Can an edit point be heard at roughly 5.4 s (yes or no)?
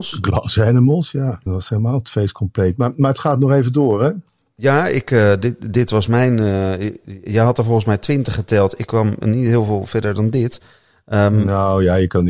no